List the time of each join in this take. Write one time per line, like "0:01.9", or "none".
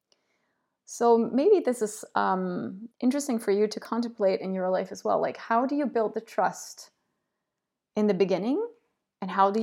0:02.9